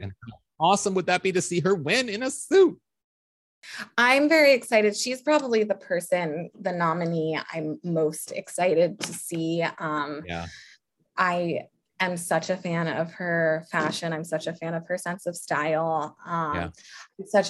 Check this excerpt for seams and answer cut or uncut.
uncut